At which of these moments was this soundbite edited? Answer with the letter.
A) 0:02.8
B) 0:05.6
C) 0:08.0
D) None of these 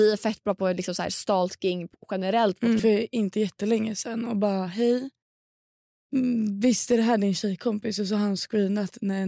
A